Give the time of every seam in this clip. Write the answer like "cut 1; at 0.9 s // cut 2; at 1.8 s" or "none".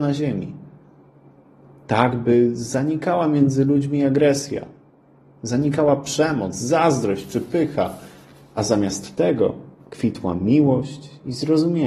none